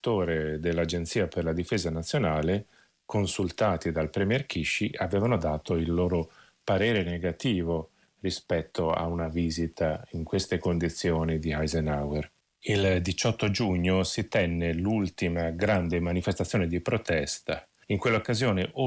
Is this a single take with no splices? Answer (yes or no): yes